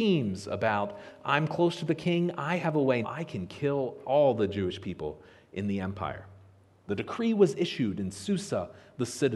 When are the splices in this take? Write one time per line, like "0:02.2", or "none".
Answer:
0:03.0
0:06.9